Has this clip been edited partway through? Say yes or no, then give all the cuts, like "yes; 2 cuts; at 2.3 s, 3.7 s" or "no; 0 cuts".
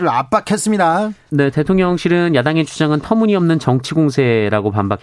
yes; 1 cut; at 1.3 s